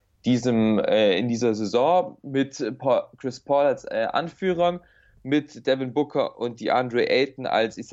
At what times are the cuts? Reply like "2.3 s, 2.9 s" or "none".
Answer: none

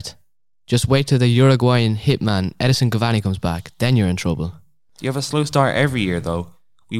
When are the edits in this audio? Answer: none

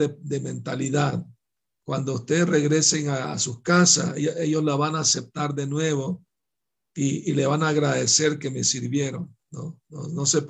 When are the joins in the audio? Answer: none

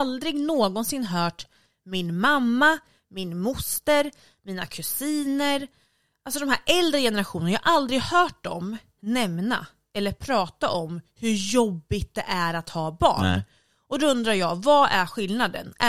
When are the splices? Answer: none

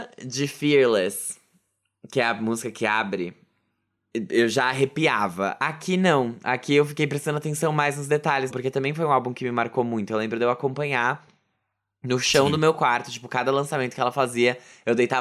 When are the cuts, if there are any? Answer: 8.5 s

